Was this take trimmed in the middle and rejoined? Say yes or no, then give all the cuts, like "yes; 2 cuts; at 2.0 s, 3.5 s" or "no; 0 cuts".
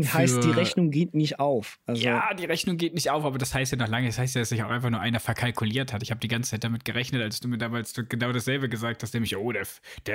no; 0 cuts